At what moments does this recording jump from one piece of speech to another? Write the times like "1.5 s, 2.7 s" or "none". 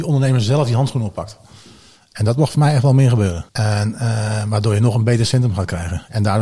3.5 s